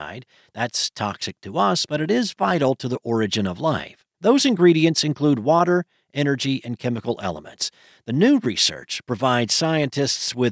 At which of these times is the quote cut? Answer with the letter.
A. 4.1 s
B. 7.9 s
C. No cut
A